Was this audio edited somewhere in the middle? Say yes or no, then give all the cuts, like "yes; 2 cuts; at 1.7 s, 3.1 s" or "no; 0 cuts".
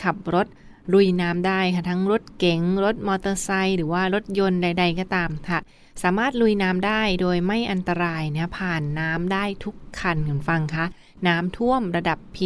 no; 0 cuts